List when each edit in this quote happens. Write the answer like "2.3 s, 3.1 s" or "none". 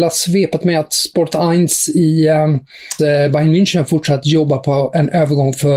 3.0 s